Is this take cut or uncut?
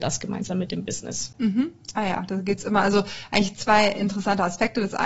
uncut